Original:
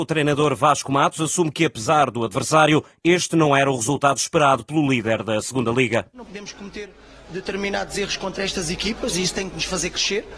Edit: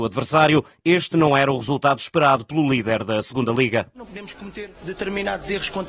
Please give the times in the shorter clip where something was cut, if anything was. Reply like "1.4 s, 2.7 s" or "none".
4.7 s